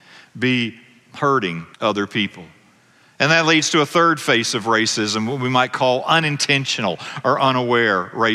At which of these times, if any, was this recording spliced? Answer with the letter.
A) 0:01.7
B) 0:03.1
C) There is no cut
A